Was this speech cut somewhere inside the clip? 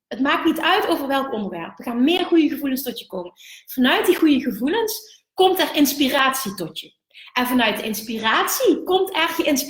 no; 0 cuts

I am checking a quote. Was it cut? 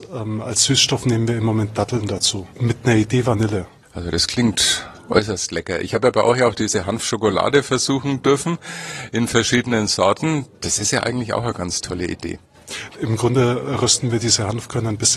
yes; 1 cut; at 12.9 s

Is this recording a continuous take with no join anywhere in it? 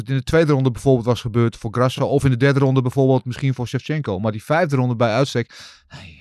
yes; 0 cuts

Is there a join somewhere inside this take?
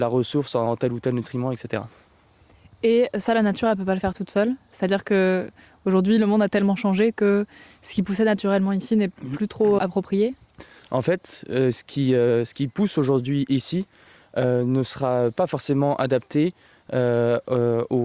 yes; 1 cut; at 9.8 s

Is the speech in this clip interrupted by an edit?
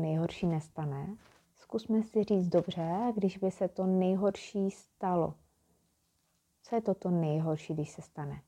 yes; 1 cut; at 1.5 s

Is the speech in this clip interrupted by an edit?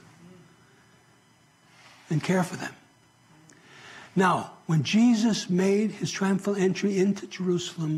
no; 0 cuts

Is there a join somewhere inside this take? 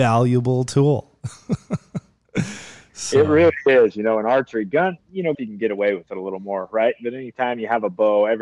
yes; 1 cut; at 5.3 s

